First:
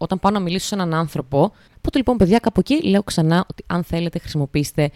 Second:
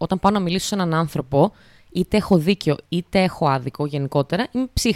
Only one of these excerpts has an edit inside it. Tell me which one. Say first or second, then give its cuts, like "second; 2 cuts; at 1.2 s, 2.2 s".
first; 1 cut; at 1.7 s